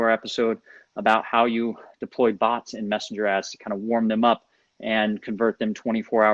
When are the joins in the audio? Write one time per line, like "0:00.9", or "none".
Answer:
none